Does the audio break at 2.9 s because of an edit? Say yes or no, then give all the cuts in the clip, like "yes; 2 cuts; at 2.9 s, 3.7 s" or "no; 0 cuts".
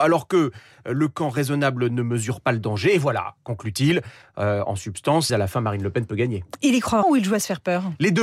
no; 2 cuts; at 5.3 s, 7.0 s